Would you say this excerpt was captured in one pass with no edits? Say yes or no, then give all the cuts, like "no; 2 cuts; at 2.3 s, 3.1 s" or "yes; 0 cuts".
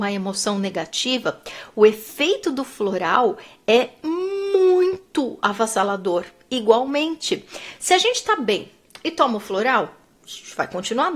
yes; 0 cuts